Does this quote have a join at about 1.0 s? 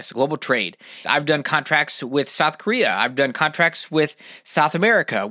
yes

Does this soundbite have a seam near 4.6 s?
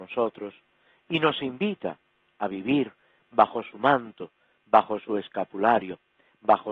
no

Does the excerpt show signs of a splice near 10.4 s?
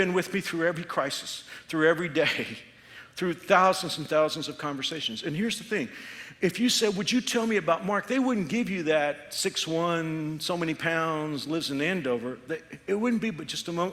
no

